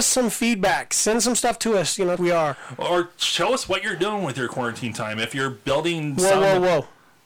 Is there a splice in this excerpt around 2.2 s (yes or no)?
yes